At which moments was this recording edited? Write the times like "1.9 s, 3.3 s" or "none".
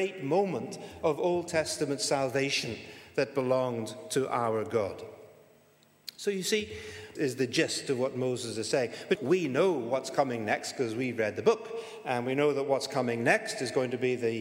7.2 s, 9.2 s